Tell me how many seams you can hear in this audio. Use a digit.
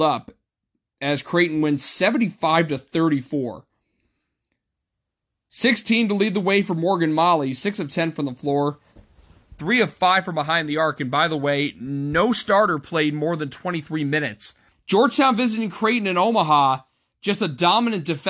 1